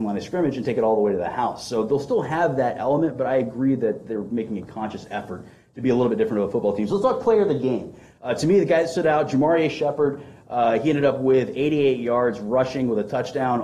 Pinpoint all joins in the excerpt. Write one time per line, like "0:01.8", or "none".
none